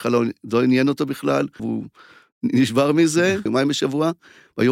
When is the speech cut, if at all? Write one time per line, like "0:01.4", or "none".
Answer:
0:01.6
0:03.5